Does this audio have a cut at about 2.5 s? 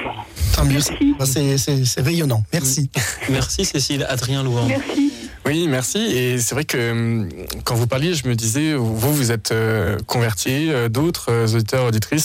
no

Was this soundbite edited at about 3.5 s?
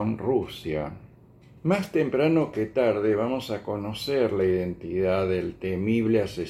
no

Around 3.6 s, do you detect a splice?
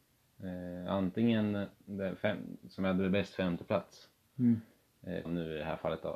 no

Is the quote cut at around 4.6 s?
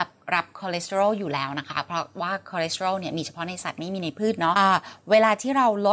yes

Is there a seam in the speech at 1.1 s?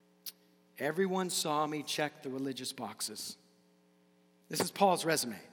no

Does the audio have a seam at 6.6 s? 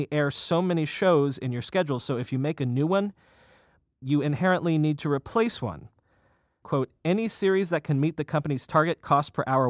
yes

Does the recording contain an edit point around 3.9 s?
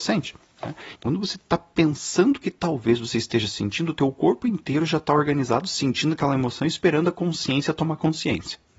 no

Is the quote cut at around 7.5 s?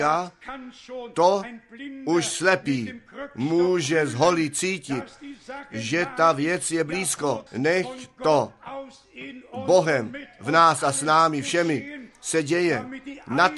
yes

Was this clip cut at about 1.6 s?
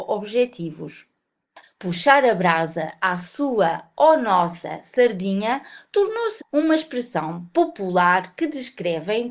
yes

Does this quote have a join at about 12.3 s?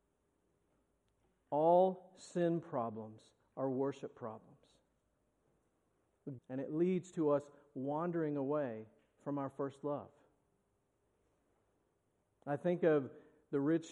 no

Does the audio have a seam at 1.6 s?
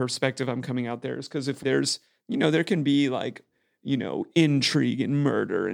yes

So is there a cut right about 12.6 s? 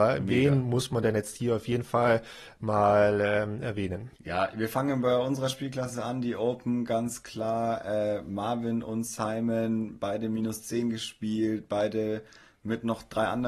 no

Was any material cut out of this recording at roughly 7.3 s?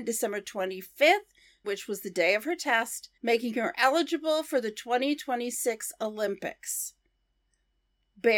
no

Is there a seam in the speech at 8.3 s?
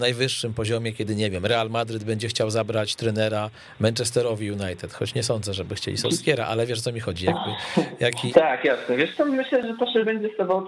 yes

